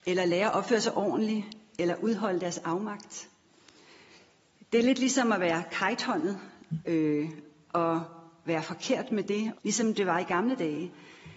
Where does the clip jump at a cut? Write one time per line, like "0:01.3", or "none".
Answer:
0:09.5